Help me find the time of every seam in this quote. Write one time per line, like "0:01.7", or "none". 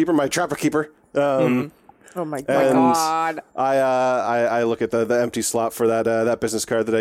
0:03.5